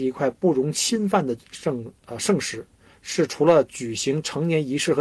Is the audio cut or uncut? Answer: uncut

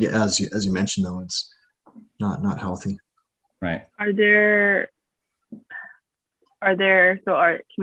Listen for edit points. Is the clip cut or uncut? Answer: cut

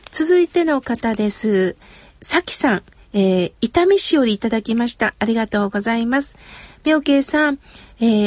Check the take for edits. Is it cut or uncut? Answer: uncut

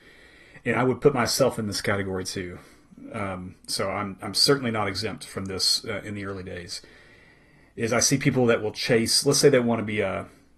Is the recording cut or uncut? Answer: uncut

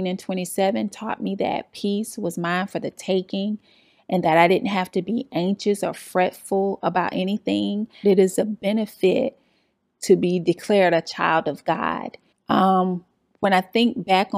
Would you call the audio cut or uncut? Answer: cut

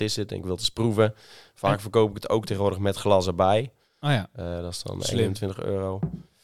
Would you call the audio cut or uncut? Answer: uncut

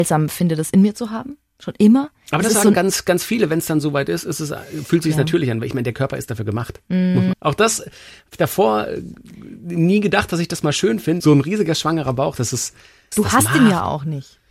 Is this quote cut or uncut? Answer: cut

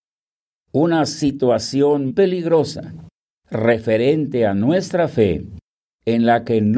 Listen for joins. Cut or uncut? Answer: cut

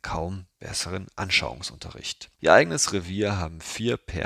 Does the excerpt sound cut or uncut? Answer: cut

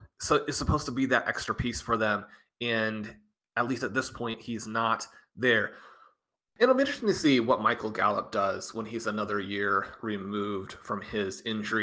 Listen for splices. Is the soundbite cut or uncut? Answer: cut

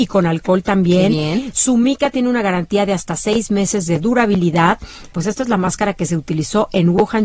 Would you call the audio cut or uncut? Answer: cut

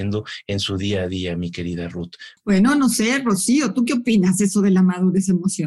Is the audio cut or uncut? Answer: cut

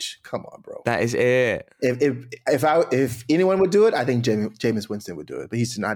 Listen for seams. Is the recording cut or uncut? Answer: uncut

